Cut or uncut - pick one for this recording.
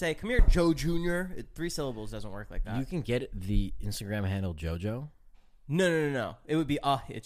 uncut